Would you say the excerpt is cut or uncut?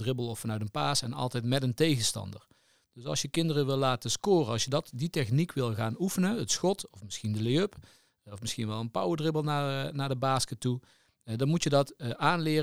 uncut